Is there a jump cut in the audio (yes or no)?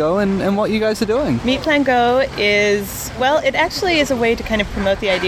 yes